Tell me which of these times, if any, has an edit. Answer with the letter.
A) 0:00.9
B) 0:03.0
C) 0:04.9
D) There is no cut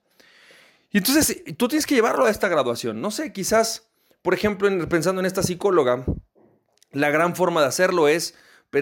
D